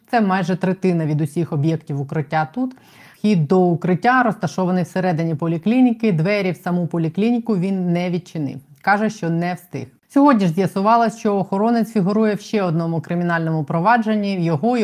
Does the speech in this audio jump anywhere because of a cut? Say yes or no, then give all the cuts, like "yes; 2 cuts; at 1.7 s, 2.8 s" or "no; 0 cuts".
yes; 1 cut; at 3.1 s